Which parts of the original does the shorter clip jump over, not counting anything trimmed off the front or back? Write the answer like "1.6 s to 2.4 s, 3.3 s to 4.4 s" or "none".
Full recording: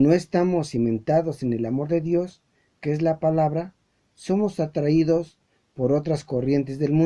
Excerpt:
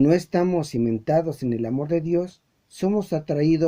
2.5 s to 4.0 s